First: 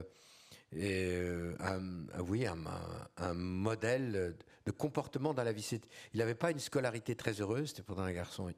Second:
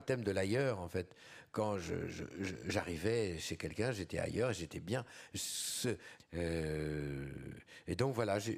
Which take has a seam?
second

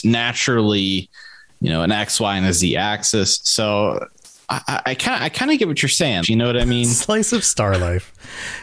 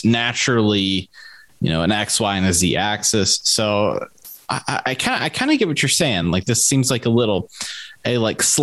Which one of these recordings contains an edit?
first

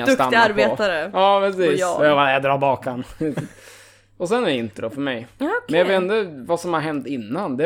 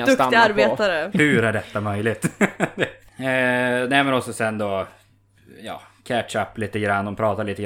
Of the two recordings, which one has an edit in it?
second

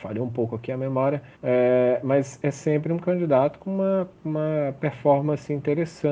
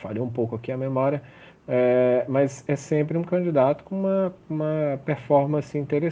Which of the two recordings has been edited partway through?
first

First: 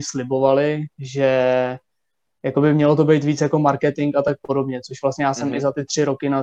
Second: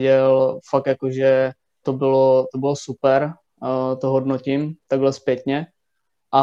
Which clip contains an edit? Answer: second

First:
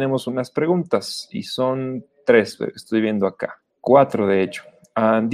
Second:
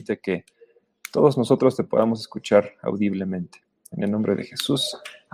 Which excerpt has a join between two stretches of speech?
first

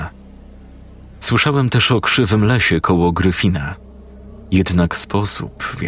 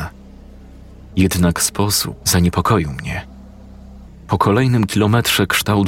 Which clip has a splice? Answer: second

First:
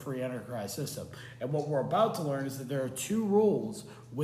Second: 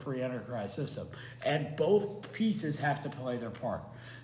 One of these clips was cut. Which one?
second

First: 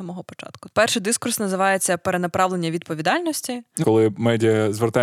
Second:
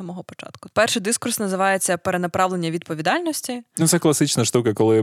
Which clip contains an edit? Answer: first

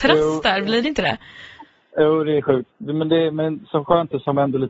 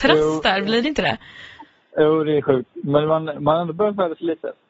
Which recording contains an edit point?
first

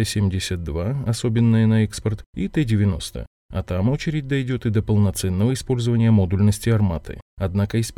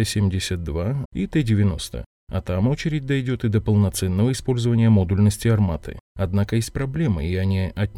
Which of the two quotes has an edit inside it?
second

